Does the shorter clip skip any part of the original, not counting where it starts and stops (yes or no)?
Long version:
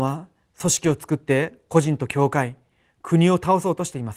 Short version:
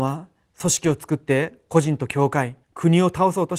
yes